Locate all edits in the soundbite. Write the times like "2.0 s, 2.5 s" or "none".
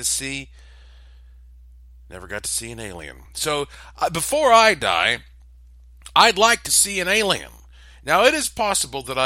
none